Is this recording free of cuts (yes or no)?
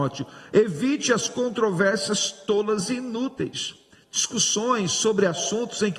yes